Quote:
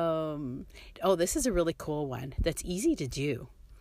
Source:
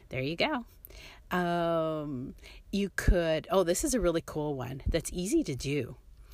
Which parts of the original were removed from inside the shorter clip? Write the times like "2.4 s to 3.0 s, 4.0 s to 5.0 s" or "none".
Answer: 2.6 s to 3.4 s